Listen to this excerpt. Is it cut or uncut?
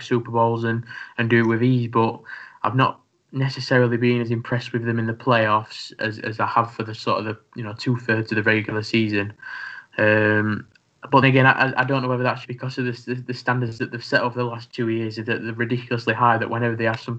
cut